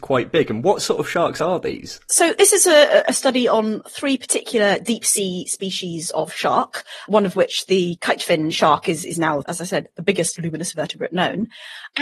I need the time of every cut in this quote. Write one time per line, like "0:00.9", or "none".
none